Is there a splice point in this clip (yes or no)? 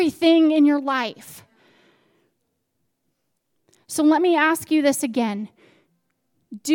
no